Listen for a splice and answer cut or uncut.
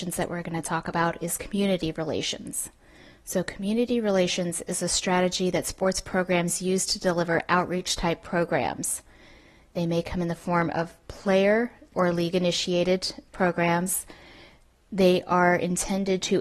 cut